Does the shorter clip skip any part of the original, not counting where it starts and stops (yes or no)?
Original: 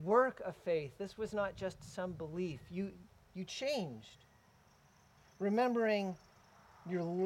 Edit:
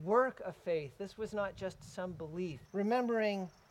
yes